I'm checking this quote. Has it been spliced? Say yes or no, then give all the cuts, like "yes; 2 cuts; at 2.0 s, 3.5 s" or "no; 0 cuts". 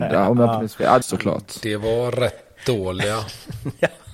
yes; 1 cut; at 1.0 s